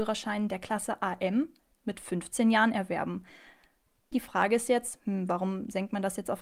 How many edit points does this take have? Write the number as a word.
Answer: one